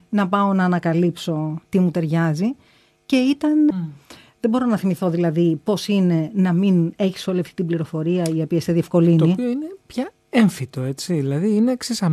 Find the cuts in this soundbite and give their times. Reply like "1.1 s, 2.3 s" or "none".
3.7 s